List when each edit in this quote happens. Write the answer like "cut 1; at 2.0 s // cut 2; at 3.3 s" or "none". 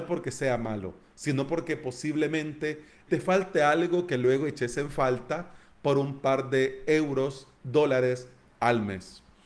cut 1; at 3.1 s // cut 2; at 7.6 s